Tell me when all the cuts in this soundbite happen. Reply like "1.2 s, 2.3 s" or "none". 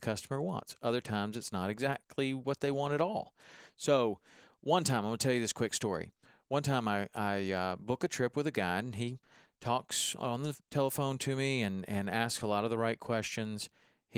none